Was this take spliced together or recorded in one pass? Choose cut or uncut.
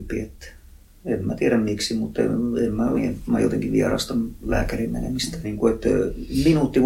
cut